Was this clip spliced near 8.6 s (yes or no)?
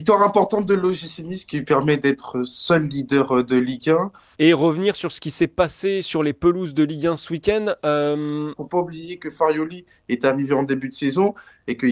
yes